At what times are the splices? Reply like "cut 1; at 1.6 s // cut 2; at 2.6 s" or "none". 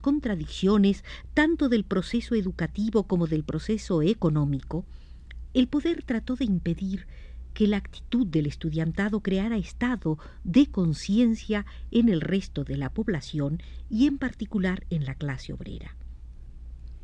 none

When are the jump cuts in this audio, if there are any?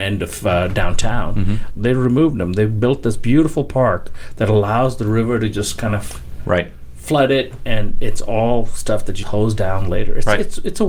cut 1; at 1.7 s // cut 2; at 9.2 s

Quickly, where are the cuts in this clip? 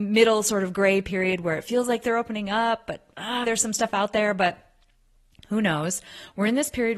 cut 1; at 3.4 s

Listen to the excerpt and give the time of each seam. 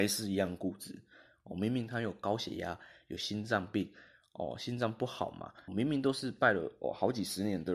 cut 1; at 5.7 s

